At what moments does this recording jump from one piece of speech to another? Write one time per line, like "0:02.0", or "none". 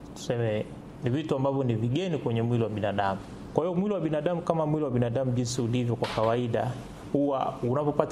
none